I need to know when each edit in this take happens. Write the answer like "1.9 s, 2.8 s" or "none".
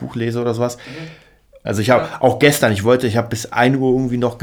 1.6 s